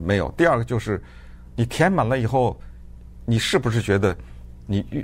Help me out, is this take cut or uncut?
uncut